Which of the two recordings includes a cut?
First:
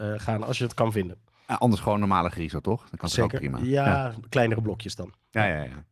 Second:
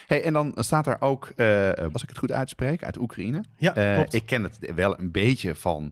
second; 1 cut; at 1.9 s

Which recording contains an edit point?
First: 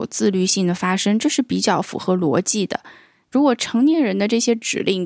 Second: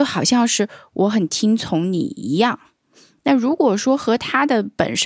first; 1 cut; at 3.3 s

